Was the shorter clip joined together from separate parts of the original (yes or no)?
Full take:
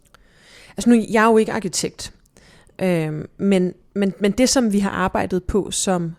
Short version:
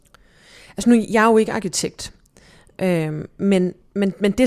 no